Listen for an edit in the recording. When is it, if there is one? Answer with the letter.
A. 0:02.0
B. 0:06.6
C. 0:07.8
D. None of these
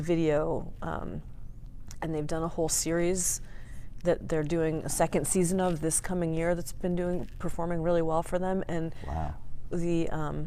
A